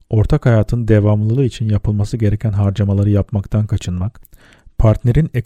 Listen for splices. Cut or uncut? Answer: uncut